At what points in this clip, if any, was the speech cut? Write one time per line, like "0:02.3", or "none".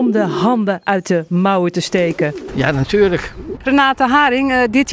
0:03.6